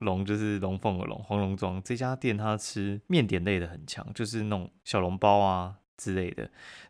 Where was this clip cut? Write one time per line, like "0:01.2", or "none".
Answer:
0:03.1